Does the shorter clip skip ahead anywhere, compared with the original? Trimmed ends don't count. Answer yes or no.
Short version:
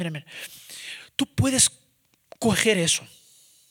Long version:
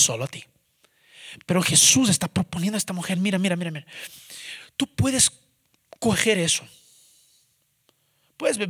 no